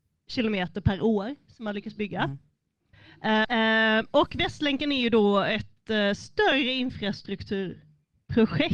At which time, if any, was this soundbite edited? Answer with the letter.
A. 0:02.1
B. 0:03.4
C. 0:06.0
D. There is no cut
B